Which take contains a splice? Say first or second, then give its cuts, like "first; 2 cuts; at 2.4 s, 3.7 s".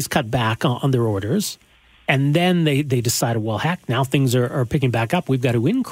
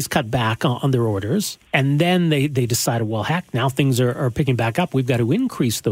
second; 1 cut; at 1.7 s